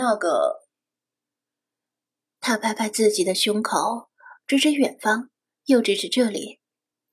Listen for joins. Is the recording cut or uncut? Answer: uncut